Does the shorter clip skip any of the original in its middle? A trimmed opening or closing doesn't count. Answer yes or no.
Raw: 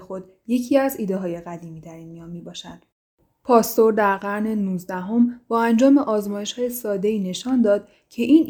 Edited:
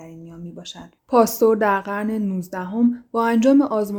yes